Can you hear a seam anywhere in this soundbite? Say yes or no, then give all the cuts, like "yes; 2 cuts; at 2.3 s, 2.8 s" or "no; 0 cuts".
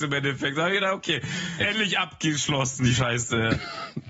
yes; 1 cut; at 1.6 s